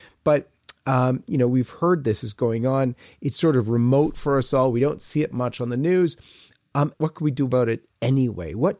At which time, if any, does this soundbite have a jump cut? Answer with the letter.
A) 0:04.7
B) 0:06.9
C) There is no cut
B